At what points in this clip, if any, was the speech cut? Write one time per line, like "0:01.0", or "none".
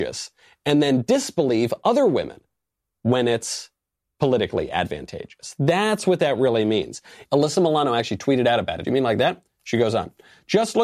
0:07.2
0:08.8